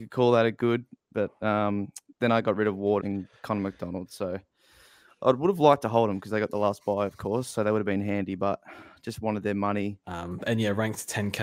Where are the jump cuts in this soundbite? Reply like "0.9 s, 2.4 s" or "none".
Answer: 3.0 s, 10.0 s